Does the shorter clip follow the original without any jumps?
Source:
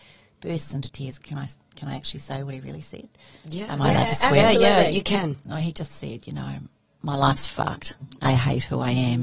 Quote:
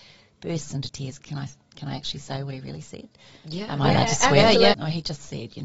no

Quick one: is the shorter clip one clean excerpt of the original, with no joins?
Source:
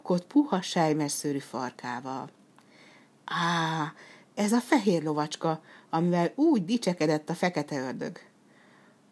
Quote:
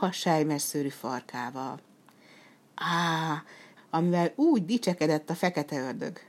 no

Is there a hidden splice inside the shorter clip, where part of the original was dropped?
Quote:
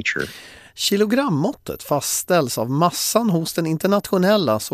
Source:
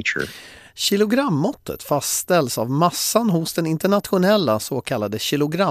no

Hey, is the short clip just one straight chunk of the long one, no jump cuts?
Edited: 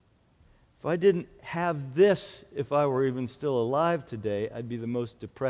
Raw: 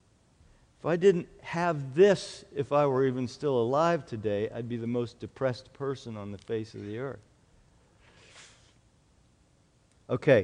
yes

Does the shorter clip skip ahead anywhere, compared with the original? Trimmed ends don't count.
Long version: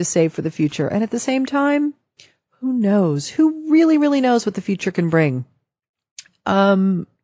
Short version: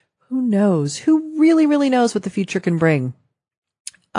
no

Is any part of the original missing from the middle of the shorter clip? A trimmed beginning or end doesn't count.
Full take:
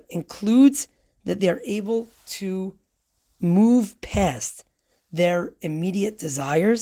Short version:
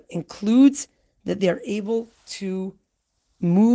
no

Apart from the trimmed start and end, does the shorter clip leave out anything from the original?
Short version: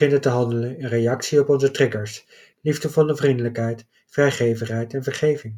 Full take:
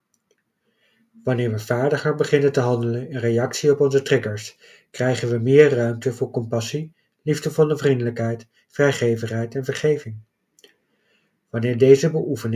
yes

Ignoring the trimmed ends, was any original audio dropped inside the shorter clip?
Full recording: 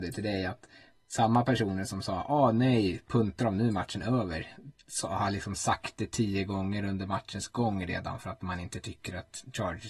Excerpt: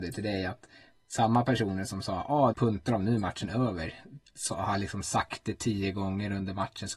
yes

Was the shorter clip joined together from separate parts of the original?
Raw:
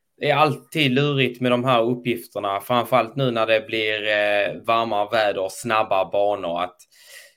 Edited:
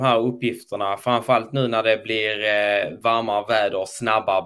no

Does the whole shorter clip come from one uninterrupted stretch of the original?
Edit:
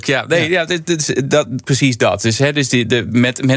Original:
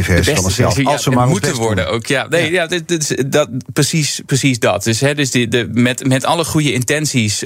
no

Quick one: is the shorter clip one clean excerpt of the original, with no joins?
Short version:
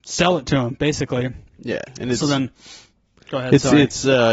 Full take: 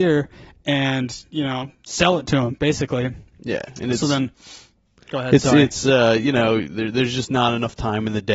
yes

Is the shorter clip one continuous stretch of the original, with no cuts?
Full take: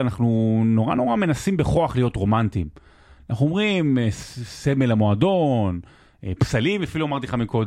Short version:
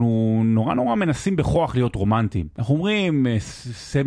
no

